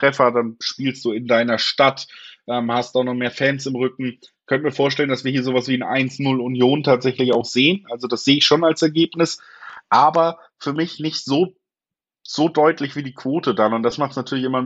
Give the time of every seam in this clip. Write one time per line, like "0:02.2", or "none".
none